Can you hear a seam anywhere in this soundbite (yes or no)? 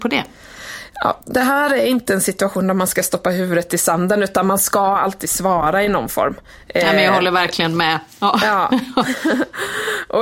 no